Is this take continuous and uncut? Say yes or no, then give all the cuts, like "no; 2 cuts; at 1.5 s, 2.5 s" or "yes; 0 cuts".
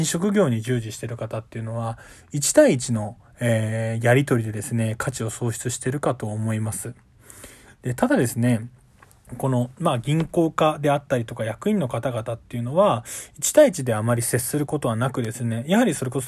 yes; 0 cuts